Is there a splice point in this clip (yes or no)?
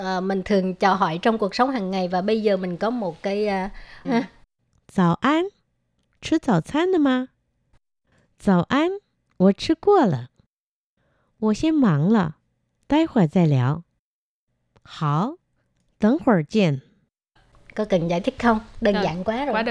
yes